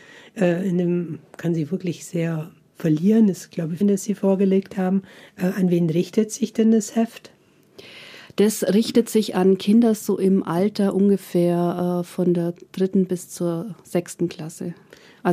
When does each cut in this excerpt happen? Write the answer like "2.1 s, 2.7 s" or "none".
3.8 s